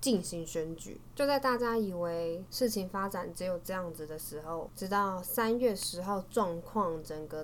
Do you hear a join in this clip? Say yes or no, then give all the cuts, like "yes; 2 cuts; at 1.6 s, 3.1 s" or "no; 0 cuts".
yes; 1 cut; at 1.1 s